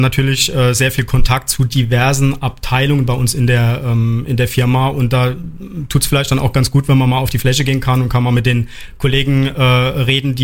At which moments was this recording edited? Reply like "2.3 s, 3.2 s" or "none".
none

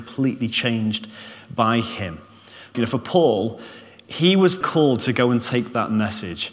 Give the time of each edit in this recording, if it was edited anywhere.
2.7 s, 4.6 s

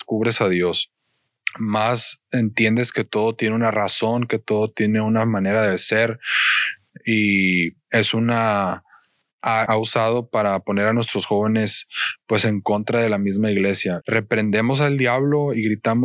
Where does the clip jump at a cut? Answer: 9.7 s, 14.0 s

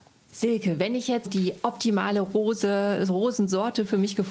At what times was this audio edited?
1.2 s

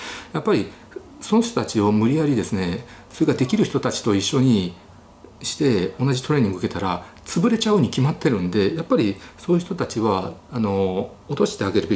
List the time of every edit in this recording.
none

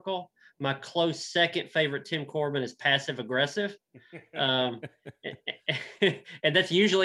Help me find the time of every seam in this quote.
none

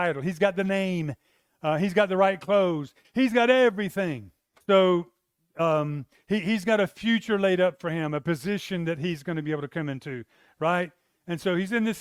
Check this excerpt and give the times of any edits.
3.0 s, 4.6 s

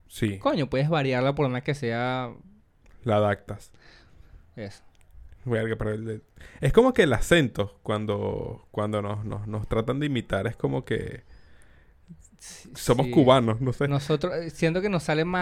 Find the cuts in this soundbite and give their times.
none

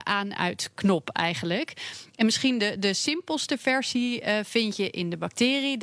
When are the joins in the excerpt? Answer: none

